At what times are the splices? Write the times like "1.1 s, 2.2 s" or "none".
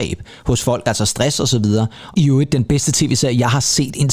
2.1 s